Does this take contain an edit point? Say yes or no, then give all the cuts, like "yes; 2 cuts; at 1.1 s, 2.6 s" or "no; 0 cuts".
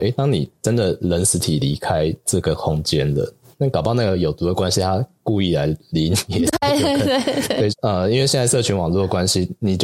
yes; 2 cuts; at 3.5 s, 7.7 s